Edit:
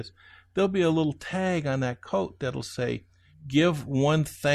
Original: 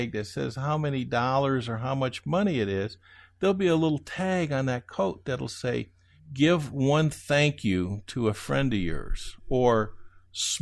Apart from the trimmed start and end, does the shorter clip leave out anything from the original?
no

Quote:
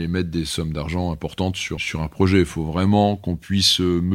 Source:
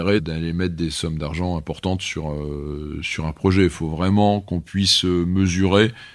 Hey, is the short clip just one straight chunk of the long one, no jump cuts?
no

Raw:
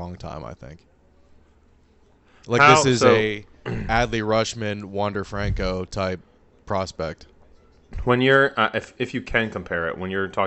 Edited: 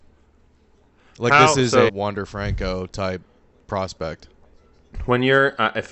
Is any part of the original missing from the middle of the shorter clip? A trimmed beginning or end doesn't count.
yes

